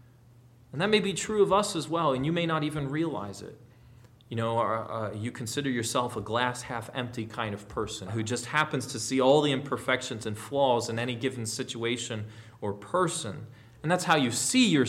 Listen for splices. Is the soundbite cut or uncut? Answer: cut